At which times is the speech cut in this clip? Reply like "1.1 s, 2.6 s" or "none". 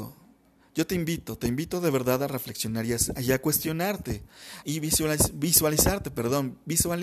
4.6 s